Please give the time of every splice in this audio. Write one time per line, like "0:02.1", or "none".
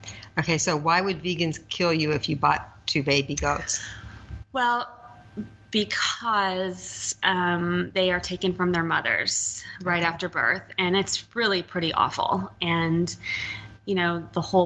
0:12.6